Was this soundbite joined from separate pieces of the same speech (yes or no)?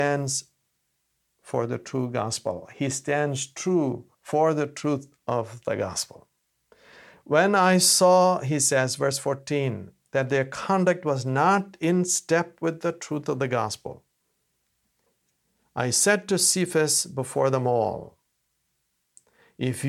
yes